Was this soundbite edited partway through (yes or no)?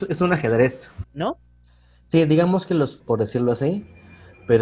yes